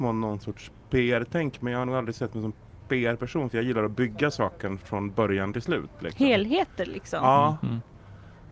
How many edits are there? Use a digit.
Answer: 0